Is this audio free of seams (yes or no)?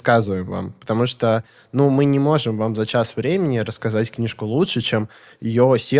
yes